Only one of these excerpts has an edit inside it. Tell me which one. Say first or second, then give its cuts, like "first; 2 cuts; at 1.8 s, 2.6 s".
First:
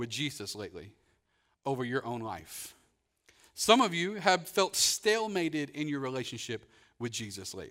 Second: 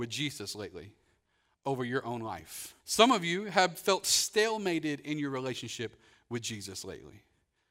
second; 1 cut; at 2.8 s